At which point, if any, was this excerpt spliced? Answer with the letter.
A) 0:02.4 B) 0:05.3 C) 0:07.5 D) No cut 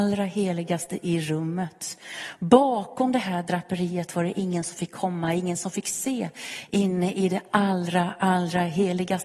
D